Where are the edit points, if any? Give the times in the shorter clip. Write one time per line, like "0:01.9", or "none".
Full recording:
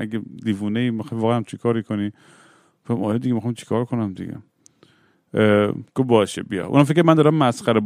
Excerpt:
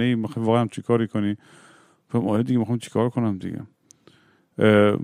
none